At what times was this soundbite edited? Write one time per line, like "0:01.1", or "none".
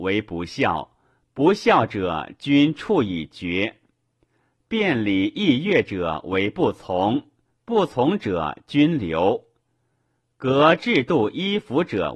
none